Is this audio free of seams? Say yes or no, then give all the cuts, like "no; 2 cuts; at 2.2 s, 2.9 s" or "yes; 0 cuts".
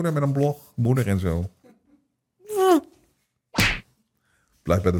yes; 0 cuts